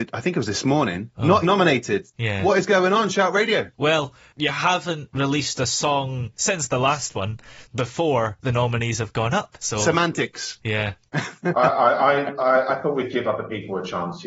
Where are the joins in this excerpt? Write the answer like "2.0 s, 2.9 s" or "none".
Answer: 1.4 s